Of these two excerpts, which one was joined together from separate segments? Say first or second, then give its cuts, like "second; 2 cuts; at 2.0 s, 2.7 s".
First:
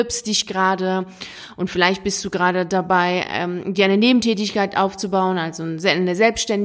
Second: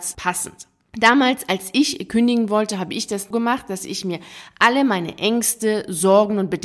second; 1 cut; at 3.3 s